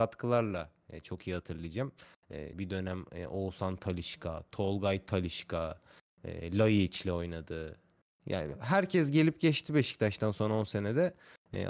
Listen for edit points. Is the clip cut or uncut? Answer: cut